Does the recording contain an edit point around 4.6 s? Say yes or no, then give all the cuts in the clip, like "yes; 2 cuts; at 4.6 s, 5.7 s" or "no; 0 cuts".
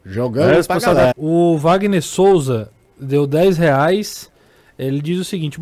no; 1 cut; at 1.1 s